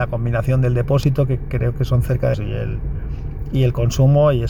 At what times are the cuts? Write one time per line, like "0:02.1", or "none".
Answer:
0:02.3